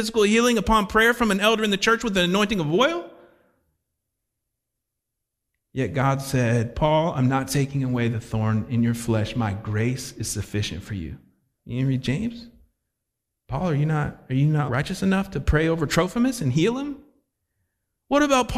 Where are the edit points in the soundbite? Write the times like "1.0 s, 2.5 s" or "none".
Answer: 11.6 s, 14.7 s